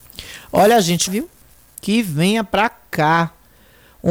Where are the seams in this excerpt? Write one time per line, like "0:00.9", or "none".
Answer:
0:01.1